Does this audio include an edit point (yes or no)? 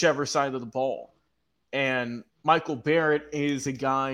no